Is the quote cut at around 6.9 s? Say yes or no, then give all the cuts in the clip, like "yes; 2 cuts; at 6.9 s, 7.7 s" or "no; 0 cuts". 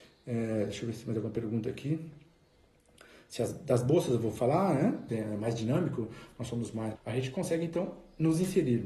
yes; 2 cuts; at 5.1 s, 6.9 s